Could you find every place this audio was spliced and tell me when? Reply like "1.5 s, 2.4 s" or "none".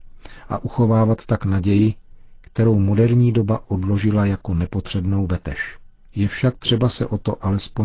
6.1 s